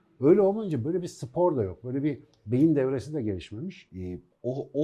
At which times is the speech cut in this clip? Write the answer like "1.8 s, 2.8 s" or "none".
3.9 s